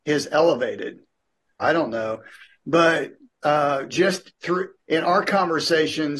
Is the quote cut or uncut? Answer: cut